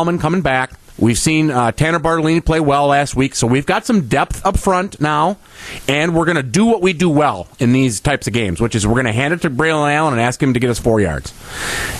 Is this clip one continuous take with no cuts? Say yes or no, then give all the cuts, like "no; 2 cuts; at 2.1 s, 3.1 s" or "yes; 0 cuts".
yes; 0 cuts